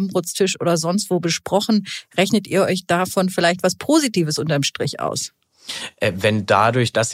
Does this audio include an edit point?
no; 0 cuts

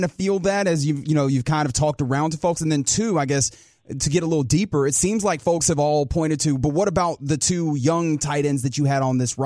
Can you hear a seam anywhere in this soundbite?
no; 0 cuts

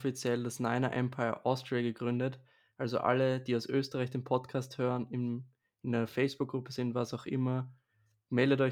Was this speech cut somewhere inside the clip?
no; 0 cuts

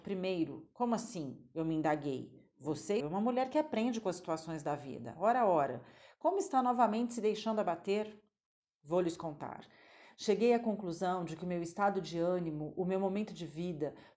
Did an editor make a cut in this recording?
yes; 1 cut; at 3.0 s

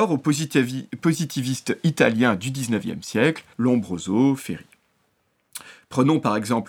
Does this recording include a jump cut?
yes; 1 cut; at 3.5 s

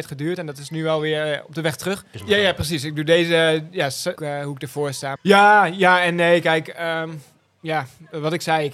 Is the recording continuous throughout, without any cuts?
no; 3 cuts; at 2.1 s, 4.2 s, 5.2 s

